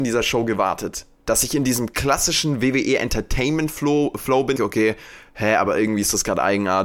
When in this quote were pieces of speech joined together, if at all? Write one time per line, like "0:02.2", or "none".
0:04.6